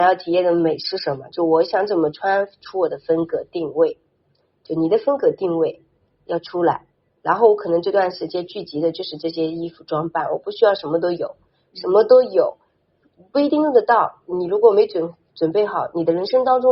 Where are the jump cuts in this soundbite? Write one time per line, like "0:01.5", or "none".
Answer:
none